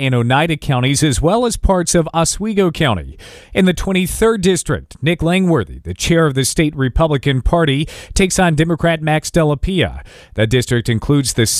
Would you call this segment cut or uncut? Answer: uncut